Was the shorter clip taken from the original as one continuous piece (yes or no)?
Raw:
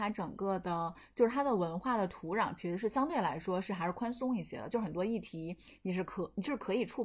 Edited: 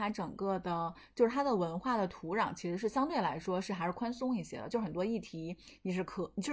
yes